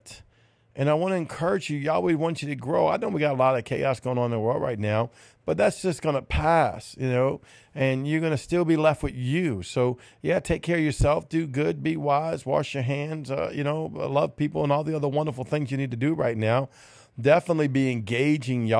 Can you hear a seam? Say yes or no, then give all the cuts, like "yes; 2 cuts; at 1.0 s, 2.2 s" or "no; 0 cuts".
no; 0 cuts